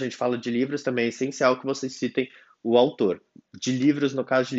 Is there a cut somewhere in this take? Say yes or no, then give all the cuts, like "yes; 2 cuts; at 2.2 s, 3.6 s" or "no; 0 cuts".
no; 0 cuts